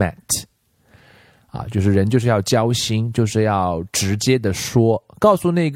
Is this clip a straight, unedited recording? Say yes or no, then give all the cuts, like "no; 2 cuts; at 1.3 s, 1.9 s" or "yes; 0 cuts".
yes; 0 cuts